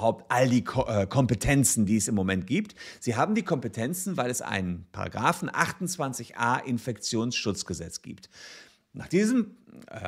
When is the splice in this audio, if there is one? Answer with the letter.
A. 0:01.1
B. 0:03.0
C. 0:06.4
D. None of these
D